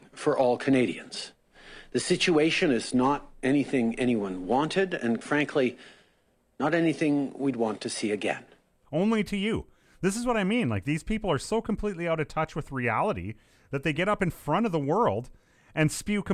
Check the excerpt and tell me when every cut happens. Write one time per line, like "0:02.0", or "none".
0:05.2
0:08.8